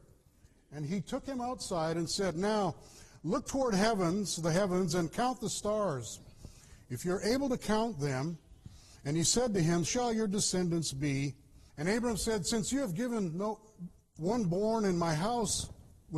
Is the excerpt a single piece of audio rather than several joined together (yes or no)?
no